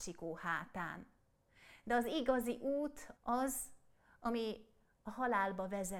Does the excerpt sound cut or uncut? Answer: cut